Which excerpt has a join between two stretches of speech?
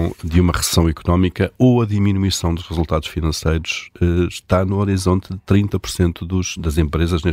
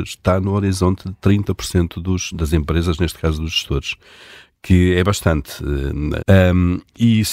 second; 1 cut; at 6.2 s

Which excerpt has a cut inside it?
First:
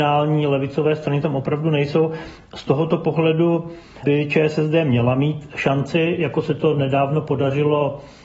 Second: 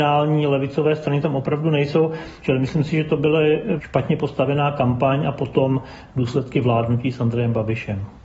second; 2 cuts; at 2.4 s, 3.8 s

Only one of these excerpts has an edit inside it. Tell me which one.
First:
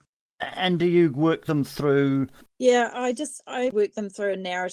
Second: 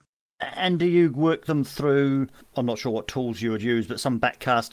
first; 2 cuts; at 2.5 s, 3.7 s

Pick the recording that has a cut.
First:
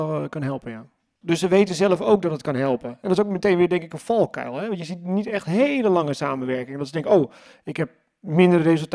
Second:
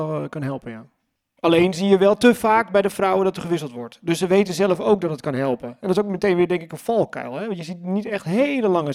first; 1 cut; at 1.2 s

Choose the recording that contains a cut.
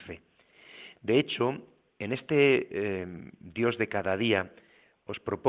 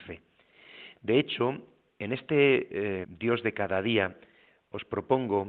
second; 1 cut; at 3.0 s

